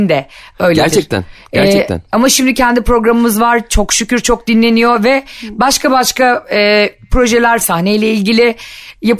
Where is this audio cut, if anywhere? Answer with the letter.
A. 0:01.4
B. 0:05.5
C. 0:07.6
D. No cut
C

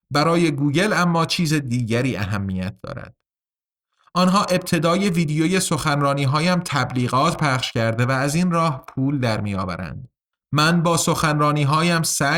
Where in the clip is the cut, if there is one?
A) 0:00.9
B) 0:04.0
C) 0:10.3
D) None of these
C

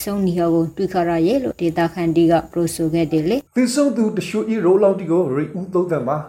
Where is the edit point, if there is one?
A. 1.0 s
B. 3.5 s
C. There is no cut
B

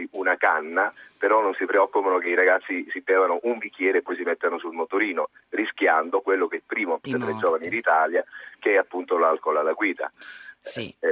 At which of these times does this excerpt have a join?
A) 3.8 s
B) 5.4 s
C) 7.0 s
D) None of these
C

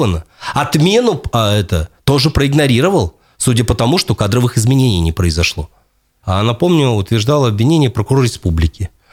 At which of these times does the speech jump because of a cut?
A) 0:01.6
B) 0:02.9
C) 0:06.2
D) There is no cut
C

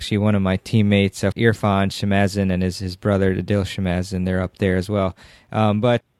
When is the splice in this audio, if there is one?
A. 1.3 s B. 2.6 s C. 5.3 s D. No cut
A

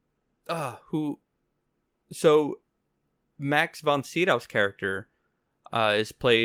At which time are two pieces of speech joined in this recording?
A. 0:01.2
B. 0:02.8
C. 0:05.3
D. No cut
D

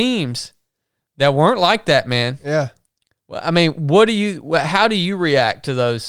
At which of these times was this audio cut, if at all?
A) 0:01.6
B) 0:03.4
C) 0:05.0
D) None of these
D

